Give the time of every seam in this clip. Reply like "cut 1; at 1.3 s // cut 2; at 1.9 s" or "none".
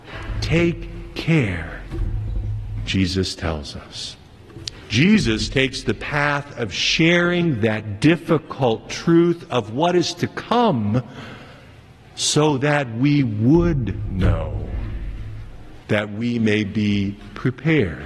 cut 1; at 4.8 s // cut 2; at 15.8 s